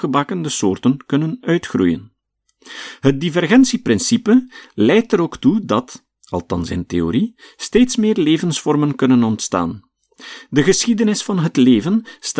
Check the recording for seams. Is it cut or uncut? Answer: uncut